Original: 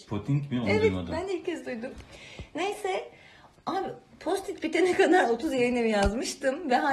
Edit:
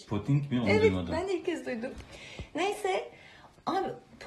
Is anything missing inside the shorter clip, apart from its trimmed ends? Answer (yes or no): no